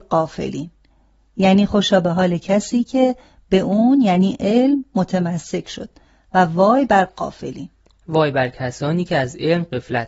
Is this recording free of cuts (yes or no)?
yes